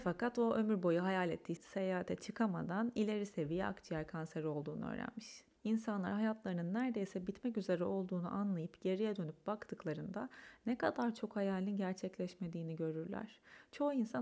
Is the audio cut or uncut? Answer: cut